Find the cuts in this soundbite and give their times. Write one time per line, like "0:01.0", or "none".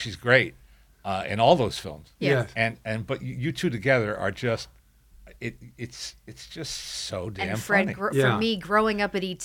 none